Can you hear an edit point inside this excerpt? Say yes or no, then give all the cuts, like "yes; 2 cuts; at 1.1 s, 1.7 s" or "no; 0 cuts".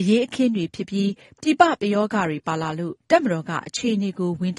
no; 0 cuts